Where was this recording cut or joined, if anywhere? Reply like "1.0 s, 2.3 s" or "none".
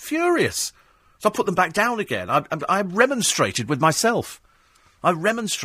none

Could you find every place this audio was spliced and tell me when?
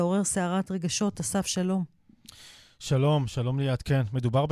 none

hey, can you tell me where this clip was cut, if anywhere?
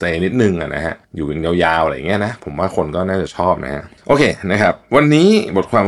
1.0 s

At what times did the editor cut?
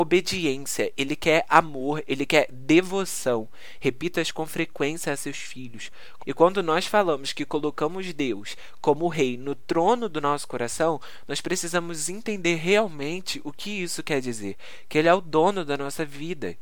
3.8 s, 6.2 s

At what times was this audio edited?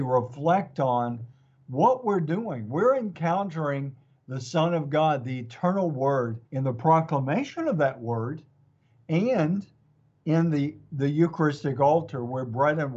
6.5 s

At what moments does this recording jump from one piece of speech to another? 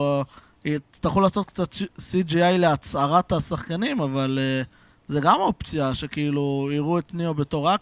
none

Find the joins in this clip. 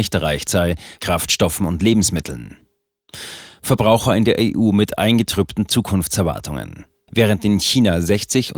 1.0 s, 7.1 s

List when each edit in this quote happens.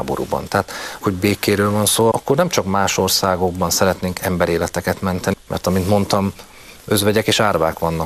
1.0 s, 2.1 s, 5.3 s

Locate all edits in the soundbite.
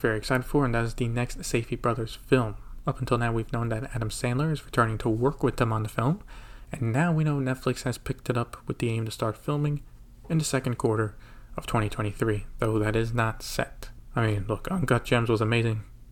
none

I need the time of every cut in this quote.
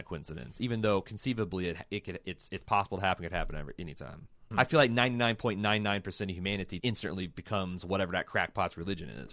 4.5 s, 6.8 s

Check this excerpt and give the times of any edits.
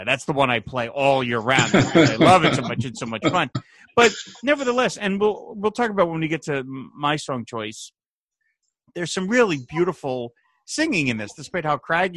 none

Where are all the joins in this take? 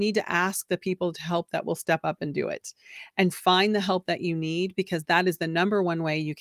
3.3 s

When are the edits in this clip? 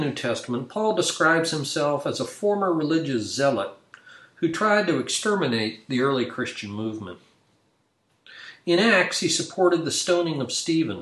none

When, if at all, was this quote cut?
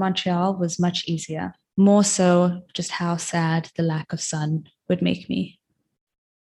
1.6 s

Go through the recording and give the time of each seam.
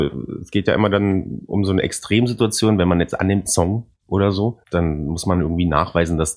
3.5 s, 4.6 s

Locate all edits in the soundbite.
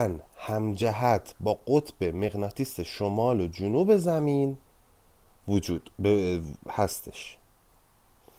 none

